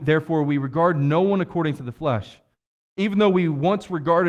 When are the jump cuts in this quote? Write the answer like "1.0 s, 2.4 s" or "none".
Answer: none